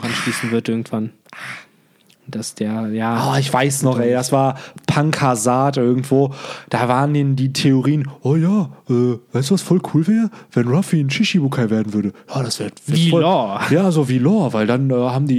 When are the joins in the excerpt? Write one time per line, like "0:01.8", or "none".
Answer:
none